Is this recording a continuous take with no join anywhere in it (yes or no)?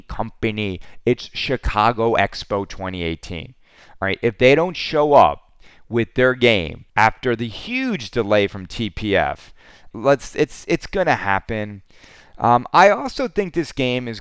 no